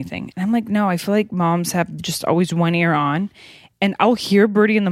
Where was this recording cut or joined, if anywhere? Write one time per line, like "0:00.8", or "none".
none